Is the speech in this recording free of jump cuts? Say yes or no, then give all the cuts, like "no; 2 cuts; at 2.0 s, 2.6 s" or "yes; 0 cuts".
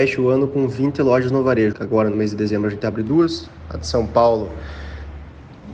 no; 1 cut; at 1.7 s